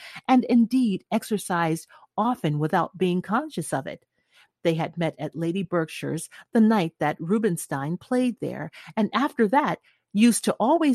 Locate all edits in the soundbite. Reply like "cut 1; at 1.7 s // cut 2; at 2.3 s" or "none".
none

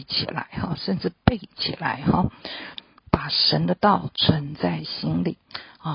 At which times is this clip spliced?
cut 1; at 2.7 s

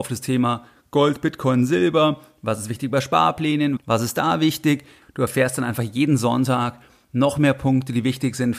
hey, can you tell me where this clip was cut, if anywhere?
cut 1; at 3.8 s // cut 2; at 5.0 s

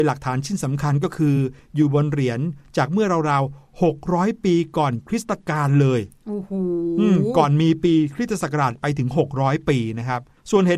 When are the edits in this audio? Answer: none

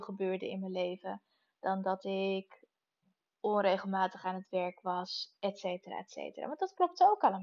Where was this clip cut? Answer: none

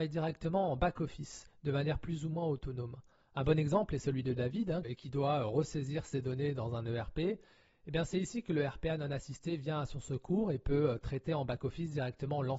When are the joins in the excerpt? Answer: cut 1; at 4.8 s

